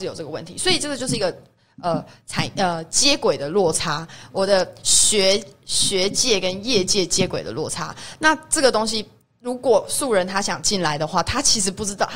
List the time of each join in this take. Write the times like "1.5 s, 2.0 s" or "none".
none